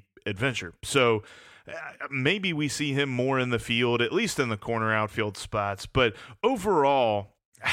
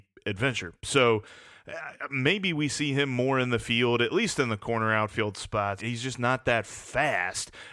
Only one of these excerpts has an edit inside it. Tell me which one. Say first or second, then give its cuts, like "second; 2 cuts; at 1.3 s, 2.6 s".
second; 1 cut; at 5.8 s